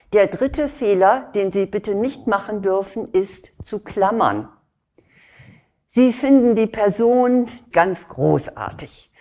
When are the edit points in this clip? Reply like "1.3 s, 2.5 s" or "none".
7.7 s

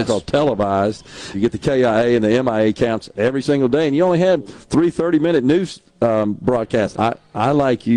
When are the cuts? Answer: 1.3 s, 6.9 s

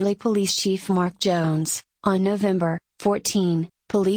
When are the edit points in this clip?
2.0 s

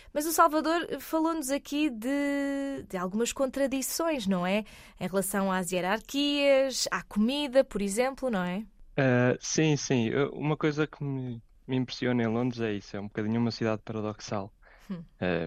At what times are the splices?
none

